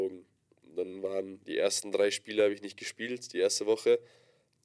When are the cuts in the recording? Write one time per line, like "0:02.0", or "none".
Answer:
none